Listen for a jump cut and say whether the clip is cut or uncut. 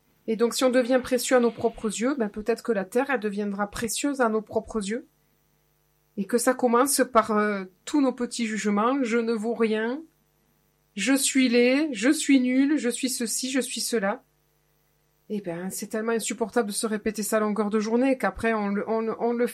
uncut